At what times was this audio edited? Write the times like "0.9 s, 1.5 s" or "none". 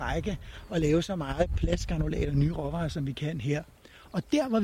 none